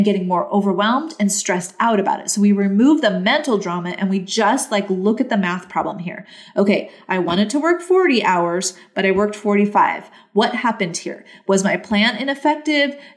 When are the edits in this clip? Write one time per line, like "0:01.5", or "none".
none